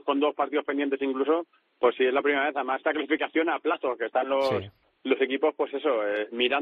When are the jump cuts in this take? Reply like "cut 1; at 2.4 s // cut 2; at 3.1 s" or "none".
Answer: cut 1; at 2.8 s